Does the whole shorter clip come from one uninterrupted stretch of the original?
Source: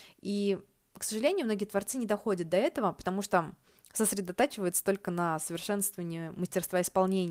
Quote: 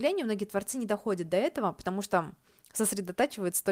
yes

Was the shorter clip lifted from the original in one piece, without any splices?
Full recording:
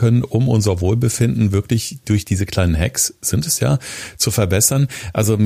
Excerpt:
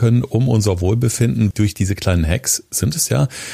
no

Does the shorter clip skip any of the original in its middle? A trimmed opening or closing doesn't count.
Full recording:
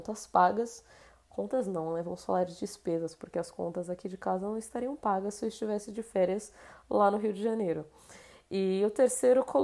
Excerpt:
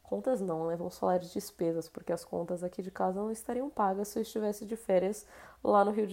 no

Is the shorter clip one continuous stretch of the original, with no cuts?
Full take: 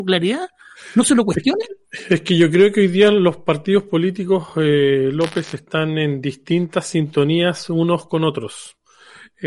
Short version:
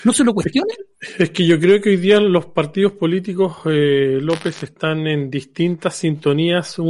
yes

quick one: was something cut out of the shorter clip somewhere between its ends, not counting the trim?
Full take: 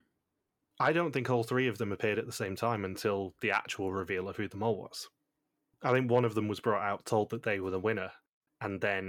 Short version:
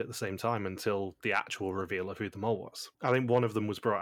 yes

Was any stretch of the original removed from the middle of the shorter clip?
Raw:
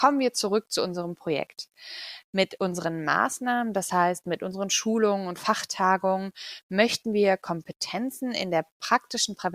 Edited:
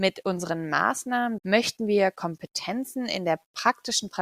yes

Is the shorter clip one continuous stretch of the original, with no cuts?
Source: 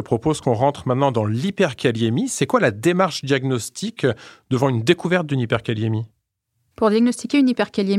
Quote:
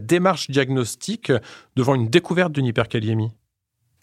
yes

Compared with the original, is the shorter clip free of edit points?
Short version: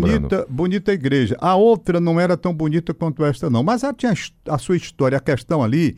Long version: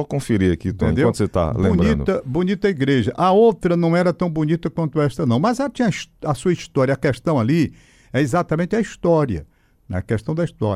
yes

